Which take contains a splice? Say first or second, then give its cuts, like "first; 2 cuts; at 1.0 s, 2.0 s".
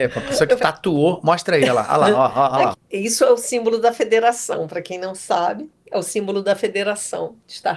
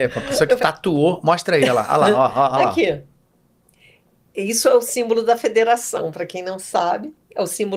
first; 1 cut; at 2.7 s